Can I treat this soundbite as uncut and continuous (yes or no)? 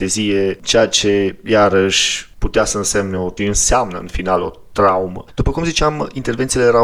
yes